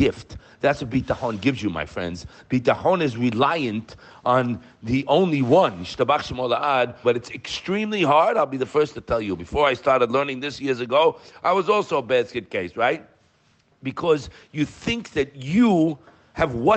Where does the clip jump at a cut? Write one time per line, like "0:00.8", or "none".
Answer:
0:07.0